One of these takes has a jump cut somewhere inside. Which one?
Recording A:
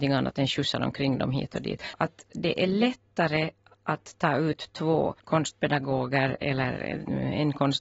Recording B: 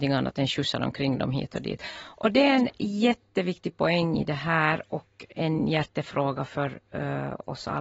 A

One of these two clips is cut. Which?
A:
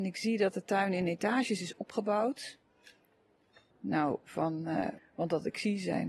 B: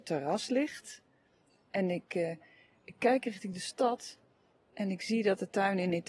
A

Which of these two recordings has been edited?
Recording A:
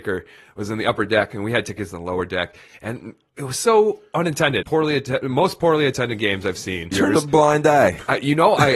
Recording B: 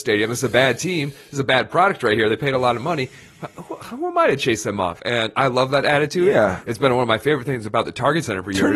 A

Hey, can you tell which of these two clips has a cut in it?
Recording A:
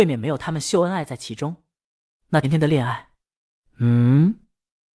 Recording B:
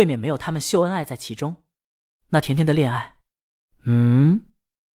A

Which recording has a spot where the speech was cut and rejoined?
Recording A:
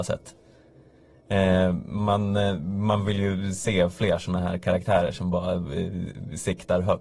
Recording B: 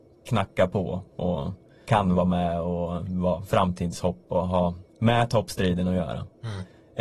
B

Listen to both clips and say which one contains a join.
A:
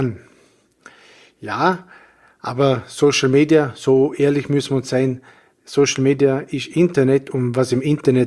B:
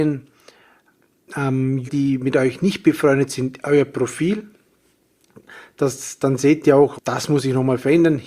B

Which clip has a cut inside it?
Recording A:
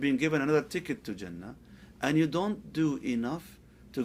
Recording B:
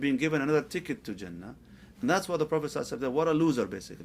B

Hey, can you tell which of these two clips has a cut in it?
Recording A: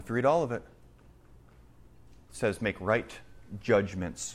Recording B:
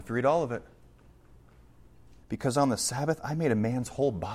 B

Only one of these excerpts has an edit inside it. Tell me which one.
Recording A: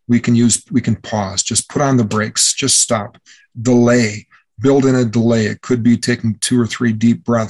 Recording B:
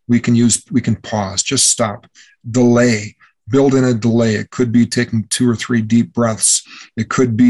B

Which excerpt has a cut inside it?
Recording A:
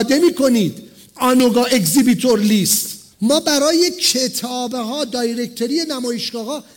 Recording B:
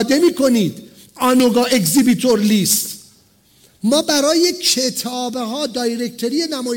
A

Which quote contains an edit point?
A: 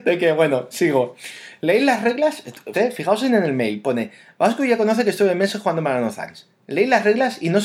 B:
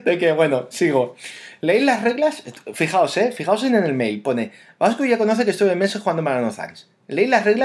A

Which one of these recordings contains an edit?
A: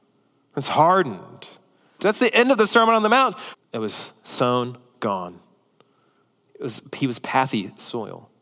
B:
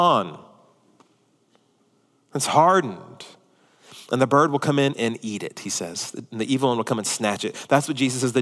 A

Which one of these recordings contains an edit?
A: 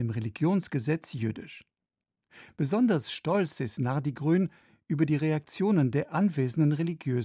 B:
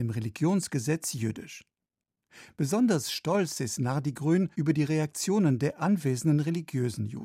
B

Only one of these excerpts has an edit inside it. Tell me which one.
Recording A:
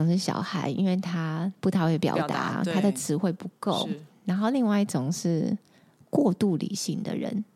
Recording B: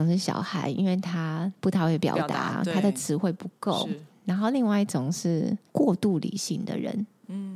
B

